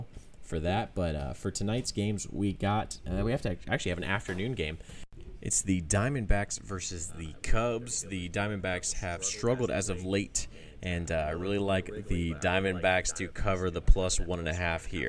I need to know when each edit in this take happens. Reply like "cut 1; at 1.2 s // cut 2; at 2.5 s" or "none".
none